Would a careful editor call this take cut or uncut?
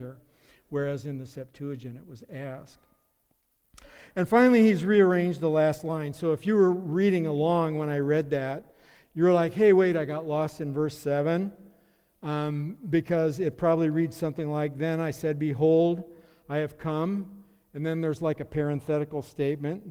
uncut